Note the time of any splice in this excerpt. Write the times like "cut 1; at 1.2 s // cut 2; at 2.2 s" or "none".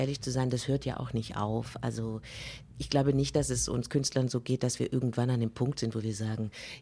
none

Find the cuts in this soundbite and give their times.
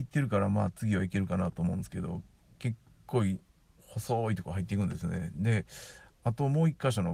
none

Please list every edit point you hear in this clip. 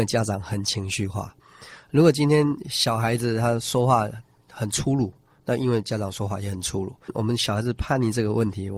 none

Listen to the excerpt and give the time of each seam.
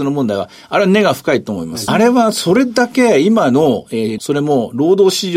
cut 1; at 1.9 s // cut 2; at 4.2 s

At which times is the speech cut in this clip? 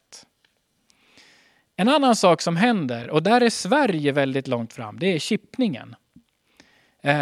none

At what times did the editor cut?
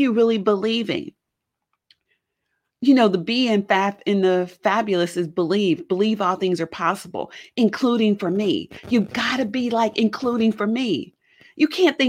none

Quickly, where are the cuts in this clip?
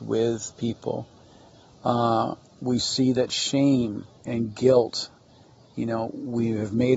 cut 1; at 4.2 s

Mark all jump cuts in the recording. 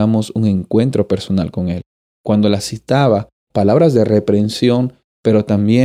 cut 1; at 2.1 s // cut 2; at 3.5 s

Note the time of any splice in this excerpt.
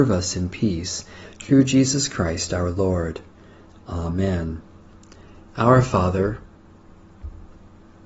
cut 1; at 1.2 s

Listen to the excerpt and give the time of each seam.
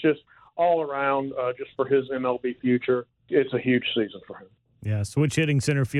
cut 1; at 3.2 s

